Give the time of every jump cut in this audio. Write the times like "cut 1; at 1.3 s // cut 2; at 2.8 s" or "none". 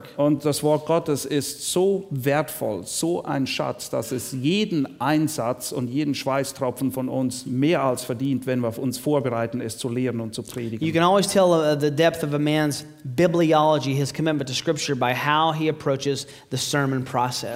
none